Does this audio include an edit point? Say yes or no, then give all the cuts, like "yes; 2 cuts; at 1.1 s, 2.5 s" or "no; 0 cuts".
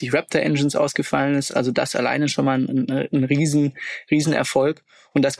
no; 0 cuts